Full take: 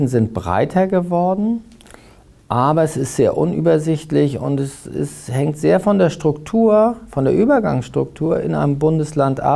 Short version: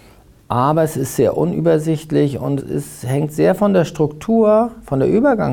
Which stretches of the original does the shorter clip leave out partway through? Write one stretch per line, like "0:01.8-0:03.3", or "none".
0:04.6-0:04.8